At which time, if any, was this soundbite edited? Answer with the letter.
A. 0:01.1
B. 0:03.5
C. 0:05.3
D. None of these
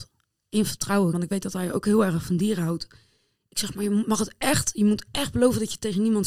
A